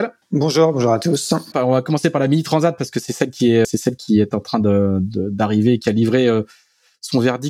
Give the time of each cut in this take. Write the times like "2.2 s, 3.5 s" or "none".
1.5 s, 3.6 s